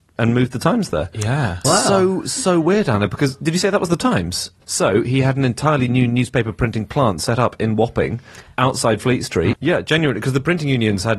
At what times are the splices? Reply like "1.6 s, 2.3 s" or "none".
1.6 s, 4.6 s, 9.5 s